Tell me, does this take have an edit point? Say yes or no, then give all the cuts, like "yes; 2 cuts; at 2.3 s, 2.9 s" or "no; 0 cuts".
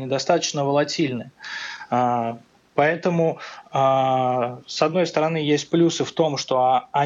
no; 0 cuts